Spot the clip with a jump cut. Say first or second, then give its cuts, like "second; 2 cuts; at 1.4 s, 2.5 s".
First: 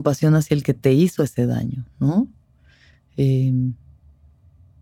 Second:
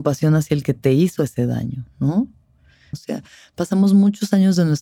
second; 1 cut; at 2.9 s